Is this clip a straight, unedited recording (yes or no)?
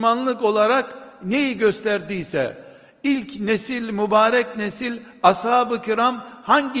yes